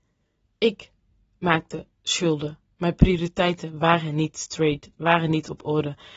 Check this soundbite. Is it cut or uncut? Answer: uncut